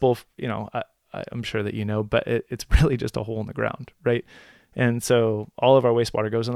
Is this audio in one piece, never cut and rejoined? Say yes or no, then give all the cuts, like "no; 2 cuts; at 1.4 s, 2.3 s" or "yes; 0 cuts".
yes; 0 cuts